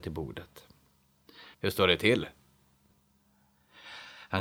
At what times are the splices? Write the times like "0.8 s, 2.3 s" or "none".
1.5 s